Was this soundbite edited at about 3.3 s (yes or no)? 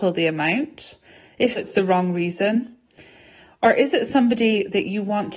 no